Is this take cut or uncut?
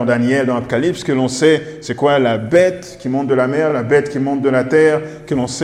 uncut